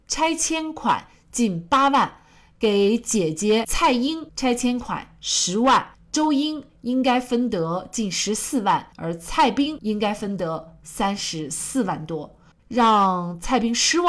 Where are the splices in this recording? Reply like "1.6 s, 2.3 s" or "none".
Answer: 5.9 s, 8.9 s, 12.5 s